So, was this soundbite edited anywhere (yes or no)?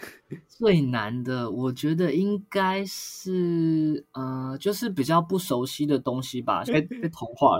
yes